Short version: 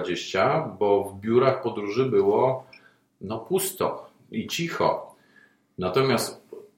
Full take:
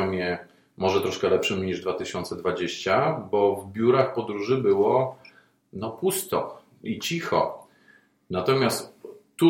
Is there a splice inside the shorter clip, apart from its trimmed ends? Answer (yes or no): no